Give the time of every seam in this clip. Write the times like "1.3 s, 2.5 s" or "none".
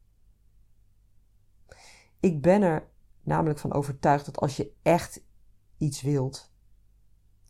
none

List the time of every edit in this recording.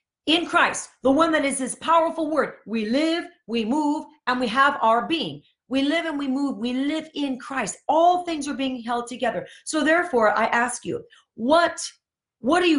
none

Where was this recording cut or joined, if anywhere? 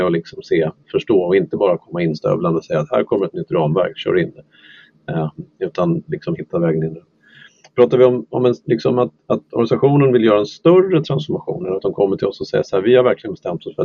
none

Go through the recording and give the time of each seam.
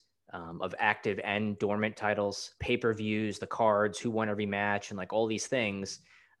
2.6 s

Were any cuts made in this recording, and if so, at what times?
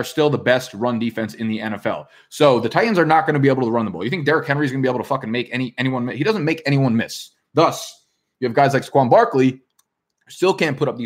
none

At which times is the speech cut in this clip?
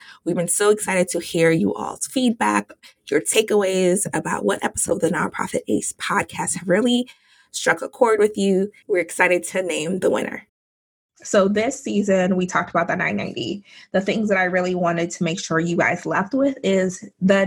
8.8 s

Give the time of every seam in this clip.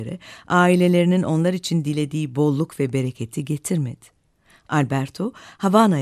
none

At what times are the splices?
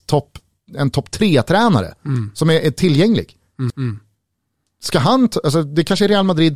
3.7 s

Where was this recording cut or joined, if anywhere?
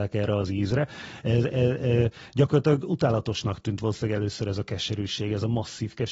none

